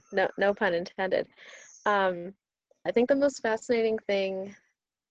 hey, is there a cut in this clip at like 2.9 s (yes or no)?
yes